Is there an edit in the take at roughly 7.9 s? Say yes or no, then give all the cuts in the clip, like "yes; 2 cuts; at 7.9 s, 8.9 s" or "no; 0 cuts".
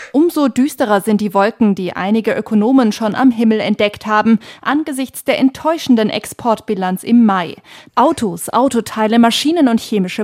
yes; 1 cut; at 7.9 s